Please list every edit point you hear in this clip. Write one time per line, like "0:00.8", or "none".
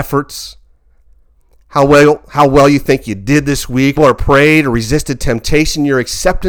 0:04.0

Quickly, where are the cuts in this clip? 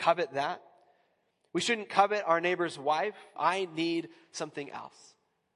0:03.4

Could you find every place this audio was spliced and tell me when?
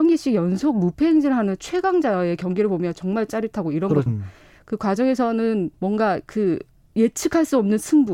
0:04.1
0:05.7

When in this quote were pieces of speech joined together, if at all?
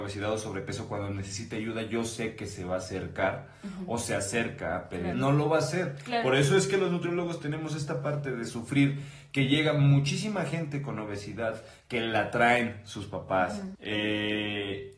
0:05.1
0:13.7

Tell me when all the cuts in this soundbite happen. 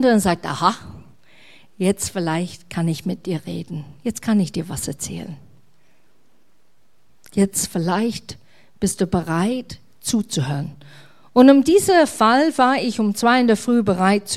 none

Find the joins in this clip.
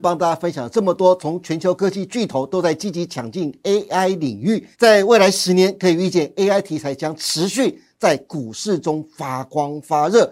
0:04.7

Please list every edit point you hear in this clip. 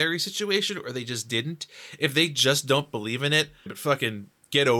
0:03.7

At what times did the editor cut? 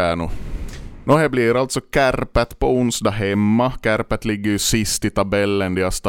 0:01.0

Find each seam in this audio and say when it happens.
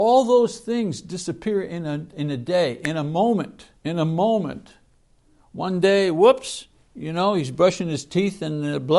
0:03.8

